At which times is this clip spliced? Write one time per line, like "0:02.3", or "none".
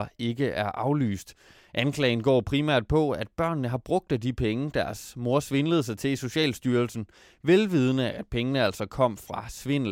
none

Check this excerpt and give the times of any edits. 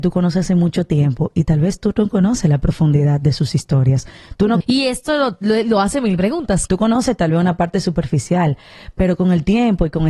0:04.6
0:06.7

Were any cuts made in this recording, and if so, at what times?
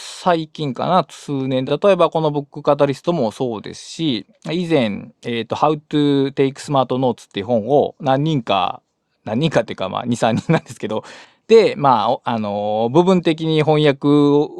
none

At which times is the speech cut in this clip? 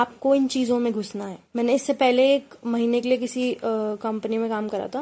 0:01.5

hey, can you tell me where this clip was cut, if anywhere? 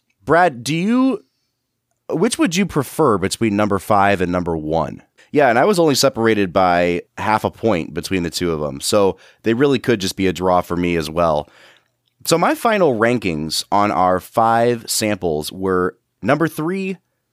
0:05.2

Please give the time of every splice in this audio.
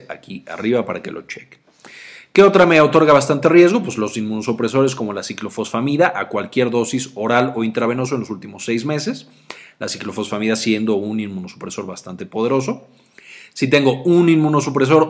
none

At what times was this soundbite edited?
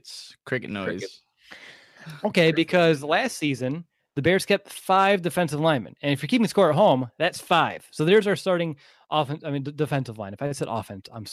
none

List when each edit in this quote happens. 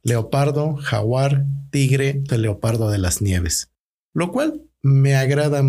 0:02.3

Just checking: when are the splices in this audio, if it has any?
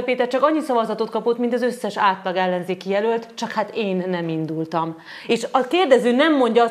none

